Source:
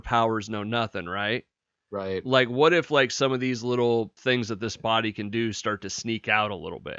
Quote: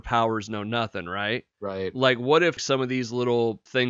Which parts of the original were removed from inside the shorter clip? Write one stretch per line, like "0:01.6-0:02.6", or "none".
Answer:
0:01.5-0:01.8
0:02.9-0:03.1